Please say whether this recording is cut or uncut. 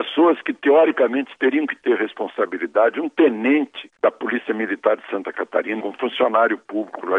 cut